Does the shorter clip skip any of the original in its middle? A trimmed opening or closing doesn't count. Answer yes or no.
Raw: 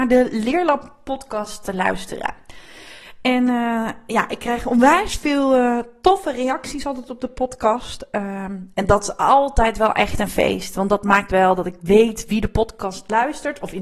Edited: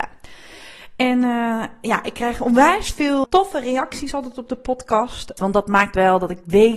yes